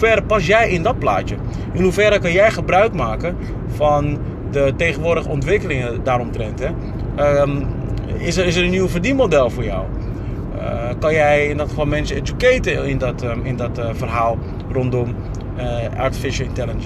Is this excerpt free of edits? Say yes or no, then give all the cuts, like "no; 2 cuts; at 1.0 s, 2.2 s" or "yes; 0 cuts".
yes; 0 cuts